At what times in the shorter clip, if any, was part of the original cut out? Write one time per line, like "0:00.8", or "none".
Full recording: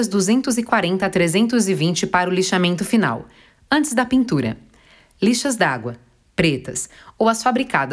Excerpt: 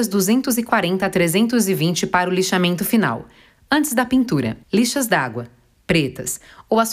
0:04.6